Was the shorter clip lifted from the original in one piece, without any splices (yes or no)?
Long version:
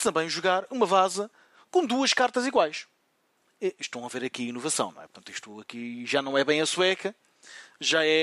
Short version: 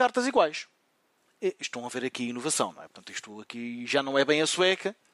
yes